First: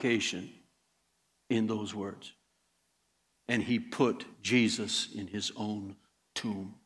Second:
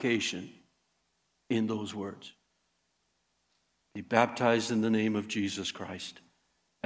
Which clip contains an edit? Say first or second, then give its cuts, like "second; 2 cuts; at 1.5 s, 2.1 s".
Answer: first; 1 cut; at 3.3 s